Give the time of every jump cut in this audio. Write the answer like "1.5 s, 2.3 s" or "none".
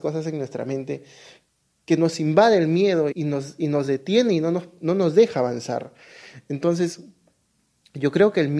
3.1 s